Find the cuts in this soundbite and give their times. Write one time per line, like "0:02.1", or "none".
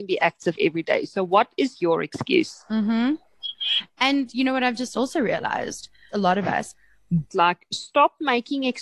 0:06.1
0:07.3